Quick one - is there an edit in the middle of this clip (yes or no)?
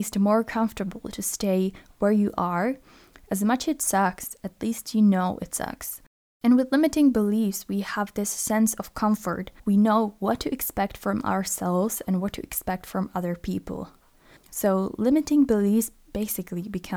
yes